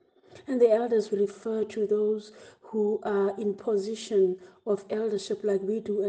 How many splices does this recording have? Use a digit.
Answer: 1